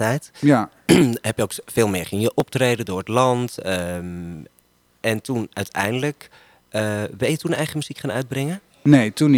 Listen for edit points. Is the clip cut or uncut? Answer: uncut